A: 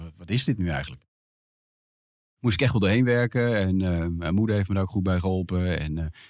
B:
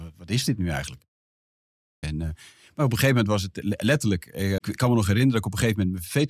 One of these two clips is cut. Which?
B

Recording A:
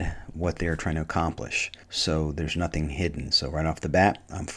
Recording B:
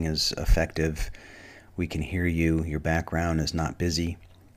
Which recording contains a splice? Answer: A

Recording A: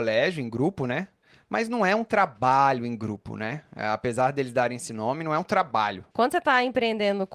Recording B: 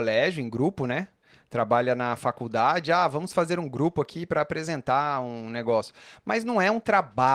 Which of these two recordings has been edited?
A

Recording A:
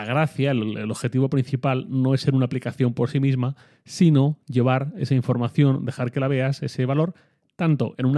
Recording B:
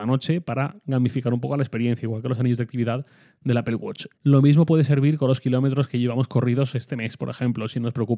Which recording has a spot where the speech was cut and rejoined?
B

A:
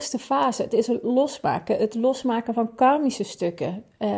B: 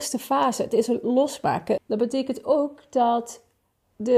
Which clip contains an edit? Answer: B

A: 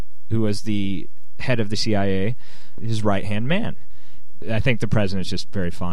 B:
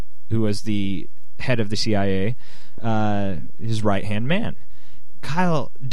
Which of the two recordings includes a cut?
A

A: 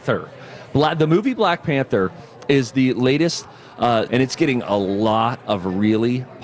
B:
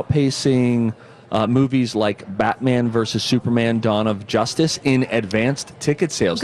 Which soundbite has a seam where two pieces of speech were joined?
A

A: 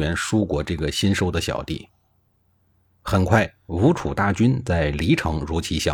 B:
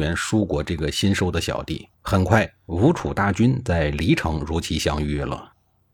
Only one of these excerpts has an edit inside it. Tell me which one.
B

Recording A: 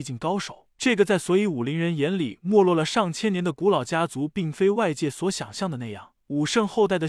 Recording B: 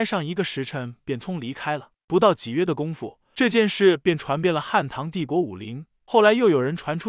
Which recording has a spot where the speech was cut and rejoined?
B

